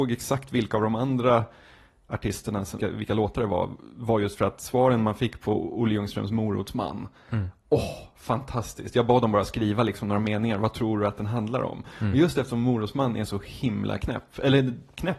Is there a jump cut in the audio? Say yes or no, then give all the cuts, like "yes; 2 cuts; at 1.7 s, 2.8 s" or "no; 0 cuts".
yes; 1 cut; at 2.8 s